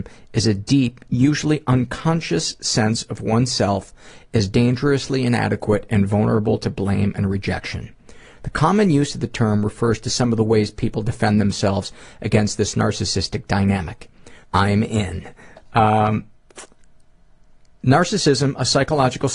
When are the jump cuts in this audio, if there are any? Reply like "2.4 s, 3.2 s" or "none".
14.4 s

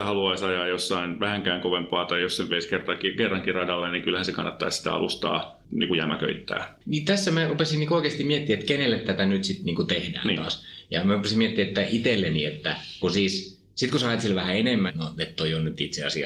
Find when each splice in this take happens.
13.0 s, 14.9 s

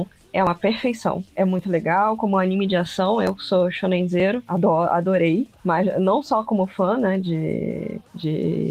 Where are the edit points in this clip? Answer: none

